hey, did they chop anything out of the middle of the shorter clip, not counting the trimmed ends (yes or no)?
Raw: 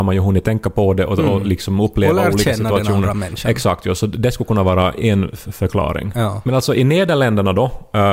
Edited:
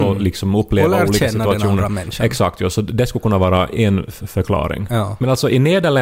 no